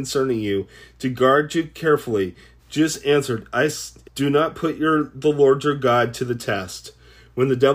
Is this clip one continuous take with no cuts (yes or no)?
no